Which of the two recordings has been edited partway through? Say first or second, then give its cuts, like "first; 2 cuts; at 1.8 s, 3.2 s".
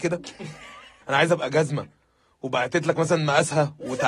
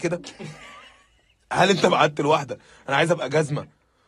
first; 1 cut; at 1.0 s